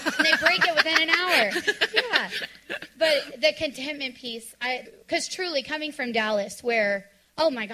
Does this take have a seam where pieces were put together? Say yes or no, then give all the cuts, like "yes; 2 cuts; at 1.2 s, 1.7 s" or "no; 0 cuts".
yes; 1 cut; at 4.9 s